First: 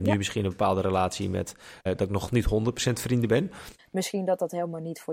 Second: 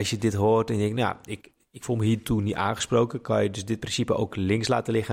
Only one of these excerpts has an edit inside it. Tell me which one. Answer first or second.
first